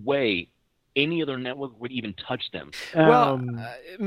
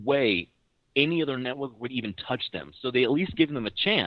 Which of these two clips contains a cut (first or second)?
first